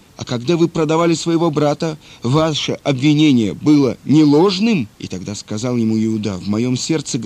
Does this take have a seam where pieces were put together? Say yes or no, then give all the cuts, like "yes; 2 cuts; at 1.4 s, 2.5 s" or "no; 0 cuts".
yes; 1 cut; at 4.9 s